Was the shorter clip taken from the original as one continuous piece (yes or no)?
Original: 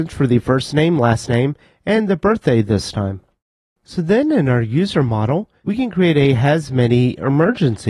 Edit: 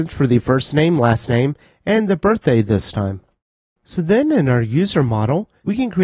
yes